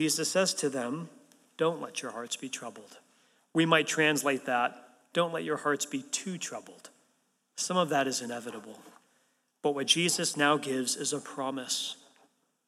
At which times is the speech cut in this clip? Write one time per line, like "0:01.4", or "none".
none

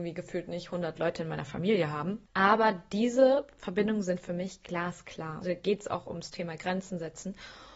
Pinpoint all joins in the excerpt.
0:02.3
0:05.4

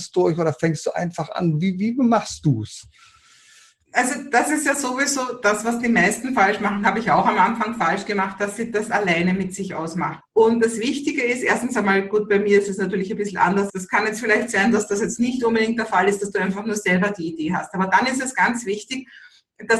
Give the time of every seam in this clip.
0:10.2
0:13.7

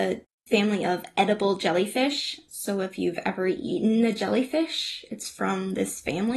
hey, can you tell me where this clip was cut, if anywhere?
none

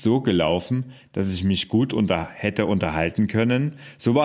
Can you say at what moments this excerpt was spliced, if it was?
none

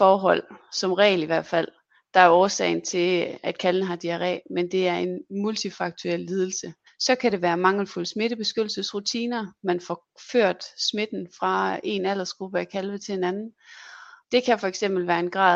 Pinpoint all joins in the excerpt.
0:06.9
0:14.2

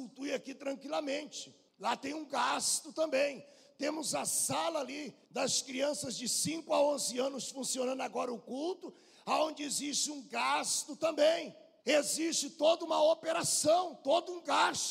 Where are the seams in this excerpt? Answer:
0:11.8

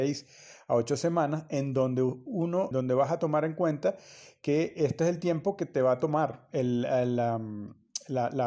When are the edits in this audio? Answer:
0:02.7

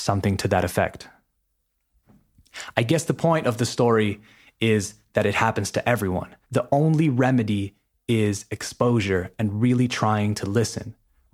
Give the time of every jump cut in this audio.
0:06.4

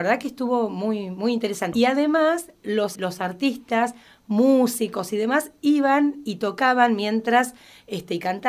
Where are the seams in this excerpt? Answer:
0:01.7
0:03.0

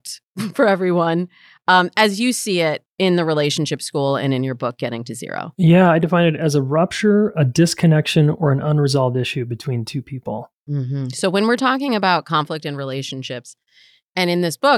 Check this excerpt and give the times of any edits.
0:02.9

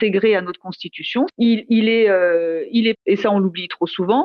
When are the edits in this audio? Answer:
0:01.3
0:02.9

